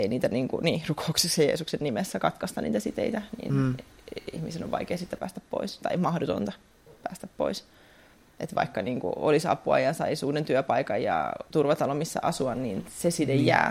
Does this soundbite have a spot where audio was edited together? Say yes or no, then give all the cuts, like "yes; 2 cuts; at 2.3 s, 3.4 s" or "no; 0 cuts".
no; 0 cuts